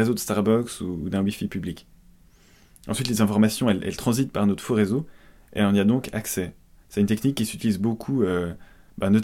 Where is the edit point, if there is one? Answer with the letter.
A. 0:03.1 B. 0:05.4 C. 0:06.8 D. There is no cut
D